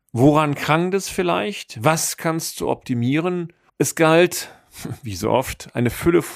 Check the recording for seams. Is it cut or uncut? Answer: cut